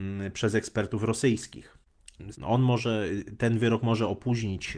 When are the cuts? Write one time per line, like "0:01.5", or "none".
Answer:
0:02.3